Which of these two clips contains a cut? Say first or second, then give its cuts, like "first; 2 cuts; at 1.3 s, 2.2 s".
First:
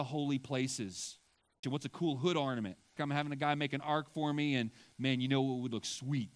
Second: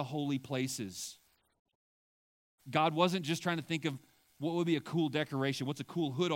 first; 2 cuts; at 1.6 s, 3.0 s